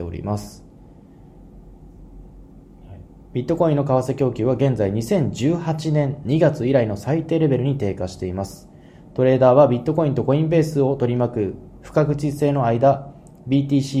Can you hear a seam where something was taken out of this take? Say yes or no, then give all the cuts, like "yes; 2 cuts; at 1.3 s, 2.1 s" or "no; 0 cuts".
yes; 1 cut; at 3.3 s